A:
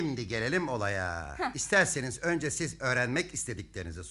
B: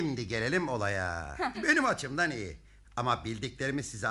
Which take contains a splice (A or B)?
B